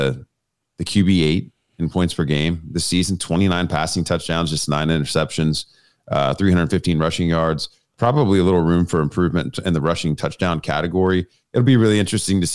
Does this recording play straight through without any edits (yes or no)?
yes